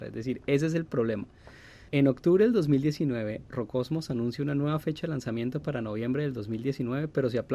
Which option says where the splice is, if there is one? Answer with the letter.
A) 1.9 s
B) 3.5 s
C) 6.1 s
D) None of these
A